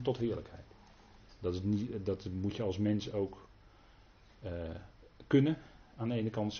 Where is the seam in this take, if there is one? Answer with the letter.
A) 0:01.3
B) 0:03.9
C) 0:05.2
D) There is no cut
A